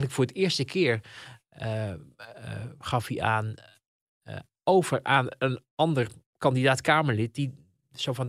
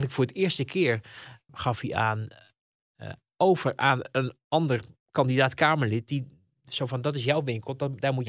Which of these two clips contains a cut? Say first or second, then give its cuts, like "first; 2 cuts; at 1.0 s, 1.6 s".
second; 1 cut; at 1.5 s